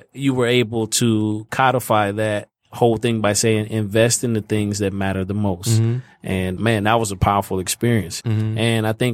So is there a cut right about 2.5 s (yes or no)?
no